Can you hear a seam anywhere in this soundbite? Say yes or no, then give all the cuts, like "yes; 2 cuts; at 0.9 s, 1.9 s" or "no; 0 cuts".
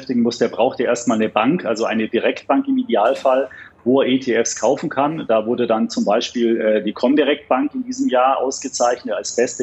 no; 0 cuts